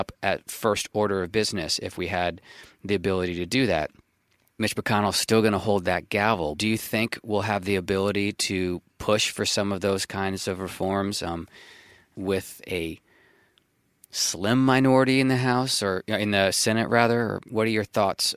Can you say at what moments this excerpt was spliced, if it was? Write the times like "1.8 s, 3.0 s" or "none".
6.6 s